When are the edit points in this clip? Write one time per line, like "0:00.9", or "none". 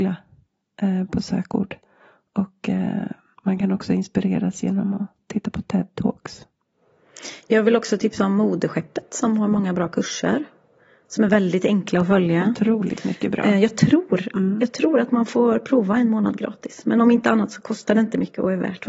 0:03.3